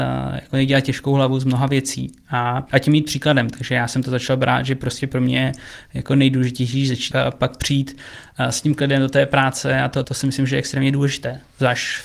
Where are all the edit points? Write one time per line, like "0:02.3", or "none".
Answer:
0:07.1
0:10.0